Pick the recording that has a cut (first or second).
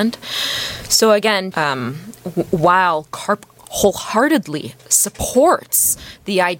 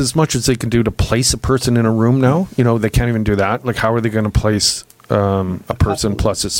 first